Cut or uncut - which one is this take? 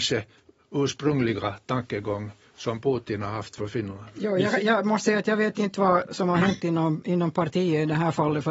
uncut